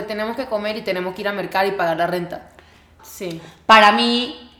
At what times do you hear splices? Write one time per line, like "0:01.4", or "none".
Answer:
0:03.0